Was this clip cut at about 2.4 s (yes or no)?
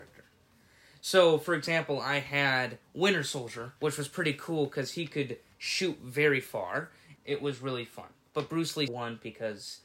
no